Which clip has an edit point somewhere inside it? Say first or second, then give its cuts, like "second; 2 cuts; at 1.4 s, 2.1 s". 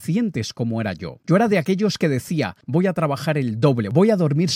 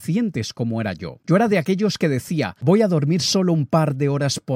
second; 1 cut; at 2.6 s